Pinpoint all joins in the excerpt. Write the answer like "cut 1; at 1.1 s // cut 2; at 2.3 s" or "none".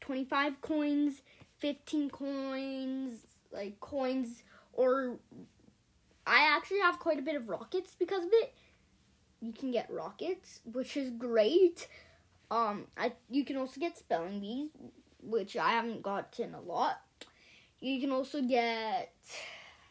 none